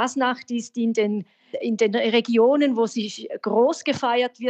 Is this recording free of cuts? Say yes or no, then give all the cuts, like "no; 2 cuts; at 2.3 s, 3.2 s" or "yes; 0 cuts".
no; 1 cut; at 1.5 s